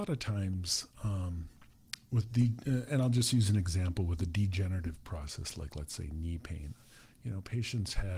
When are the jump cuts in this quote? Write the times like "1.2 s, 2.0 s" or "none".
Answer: none